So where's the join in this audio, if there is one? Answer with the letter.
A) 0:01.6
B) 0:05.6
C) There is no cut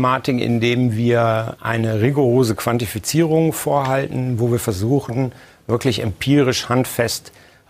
A